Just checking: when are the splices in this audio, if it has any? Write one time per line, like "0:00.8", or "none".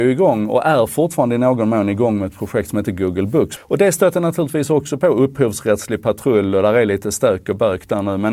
0:03.6